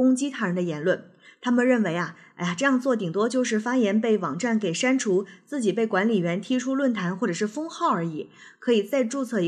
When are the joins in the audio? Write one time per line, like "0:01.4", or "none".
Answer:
none